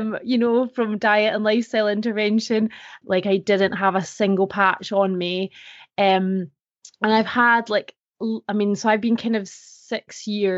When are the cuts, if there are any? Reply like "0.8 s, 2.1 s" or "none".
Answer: 3.0 s